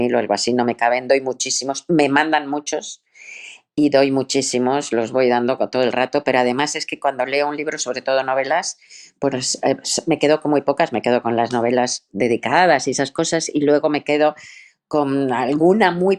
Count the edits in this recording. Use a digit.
0